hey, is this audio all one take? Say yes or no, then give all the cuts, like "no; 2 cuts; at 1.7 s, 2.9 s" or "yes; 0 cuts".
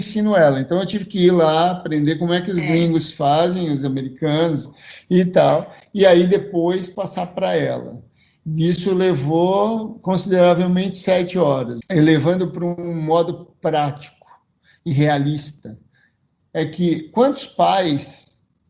no; 1 cut; at 11.8 s